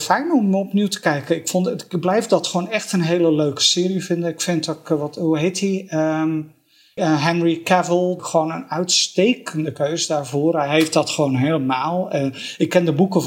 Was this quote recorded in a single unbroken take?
no; 2 cuts; at 7.0 s, 8.2 s

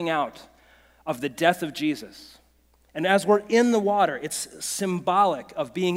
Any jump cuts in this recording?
no; 0 cuts

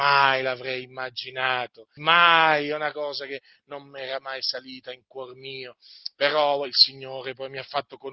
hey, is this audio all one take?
no; 1 cut; at 2.0 s

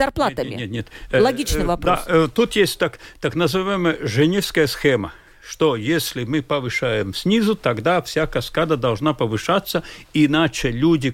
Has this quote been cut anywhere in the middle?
no; 0 cuts

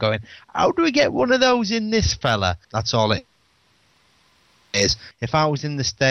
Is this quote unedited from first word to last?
no; 2 cuts; at 2.6 s, 5.1 s

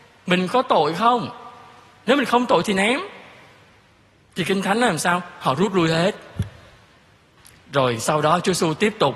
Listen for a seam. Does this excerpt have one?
no; 0 cuts

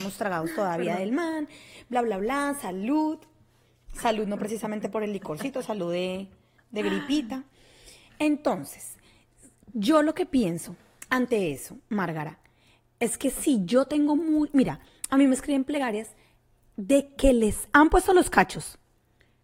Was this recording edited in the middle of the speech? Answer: no; 0 cuts

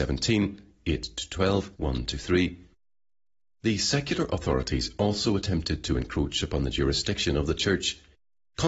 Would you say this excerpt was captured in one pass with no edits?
no; 1 cut; at 1.7 s

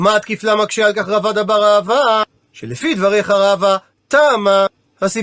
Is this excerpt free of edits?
yes; 0 cuts

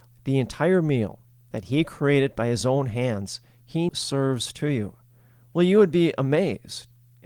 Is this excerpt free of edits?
no; 1 cut; at 3.9 s

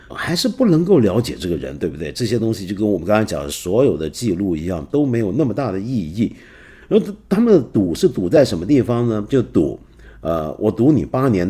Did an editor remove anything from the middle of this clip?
no; 0 cuts

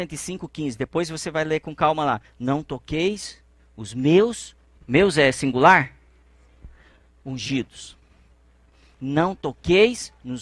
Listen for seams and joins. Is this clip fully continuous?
no; 1 cut; at 4.7 s

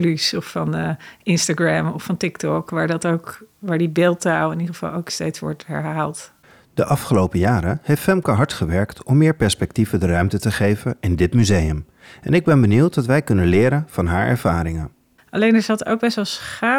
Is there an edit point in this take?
no; 0 cuts

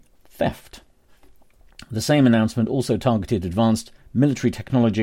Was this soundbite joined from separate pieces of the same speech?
no; 0 cuts

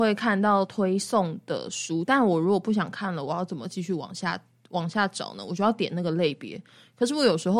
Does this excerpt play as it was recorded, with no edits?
yes; 0 cuts

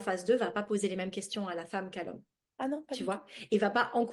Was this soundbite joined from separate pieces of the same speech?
no; 0 cuts

